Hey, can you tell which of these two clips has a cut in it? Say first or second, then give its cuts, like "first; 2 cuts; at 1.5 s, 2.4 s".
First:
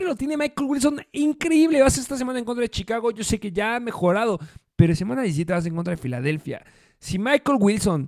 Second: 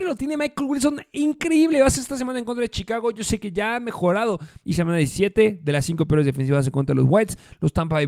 second; 1 cut; at 4.6 s